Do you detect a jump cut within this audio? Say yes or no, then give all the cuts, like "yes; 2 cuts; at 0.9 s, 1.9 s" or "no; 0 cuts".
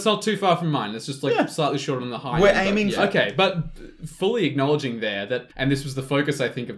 yes; 2 cuts; at 3.0 s, 5.5 s